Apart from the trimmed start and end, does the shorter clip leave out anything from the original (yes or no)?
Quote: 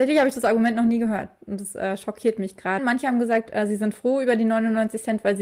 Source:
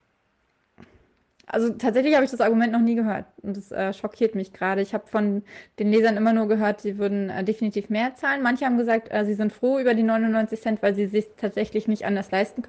yes